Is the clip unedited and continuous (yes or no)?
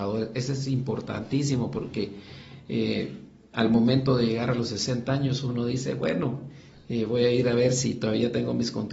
yes